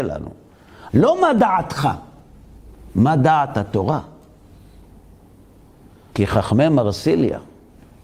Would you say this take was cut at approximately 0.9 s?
yes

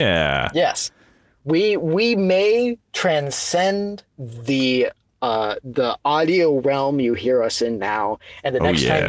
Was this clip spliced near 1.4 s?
no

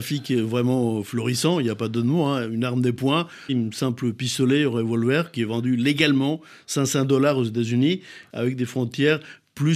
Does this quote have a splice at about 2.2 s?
no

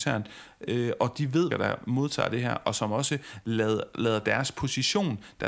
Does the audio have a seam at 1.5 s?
yes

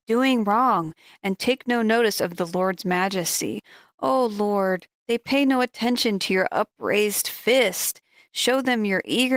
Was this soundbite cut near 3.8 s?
no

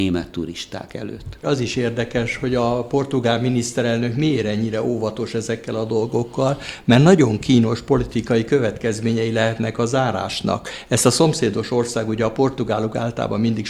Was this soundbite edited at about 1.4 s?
yes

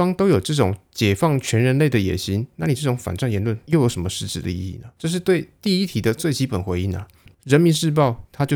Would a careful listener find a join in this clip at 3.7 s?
no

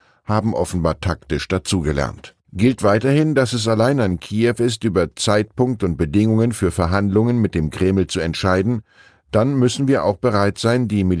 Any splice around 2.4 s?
yes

